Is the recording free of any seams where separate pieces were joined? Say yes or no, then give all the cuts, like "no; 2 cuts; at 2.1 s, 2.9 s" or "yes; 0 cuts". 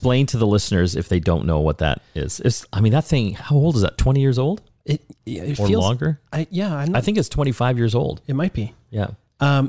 yes; 0 cuts